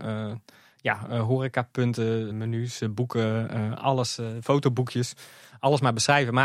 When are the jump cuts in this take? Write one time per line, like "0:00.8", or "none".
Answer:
0:02.3